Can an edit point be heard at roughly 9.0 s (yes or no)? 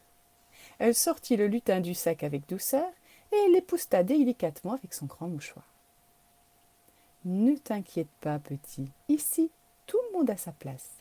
yes